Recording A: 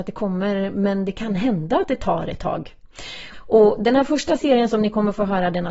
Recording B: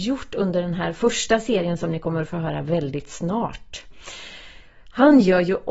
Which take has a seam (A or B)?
A